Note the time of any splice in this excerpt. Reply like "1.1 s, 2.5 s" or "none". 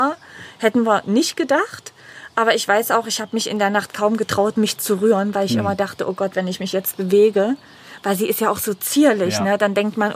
none